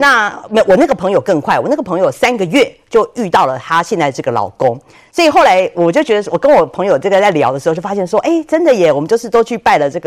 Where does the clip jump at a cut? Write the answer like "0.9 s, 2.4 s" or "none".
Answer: none